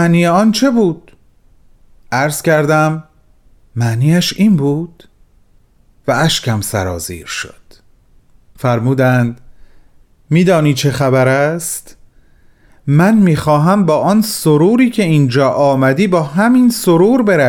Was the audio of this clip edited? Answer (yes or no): no